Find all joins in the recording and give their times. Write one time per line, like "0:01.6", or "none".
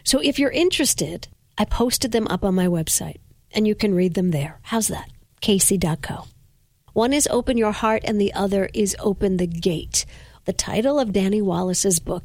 0:06.9
0:10.4